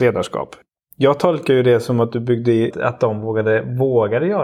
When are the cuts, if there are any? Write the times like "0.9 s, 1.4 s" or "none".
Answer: 2.7 s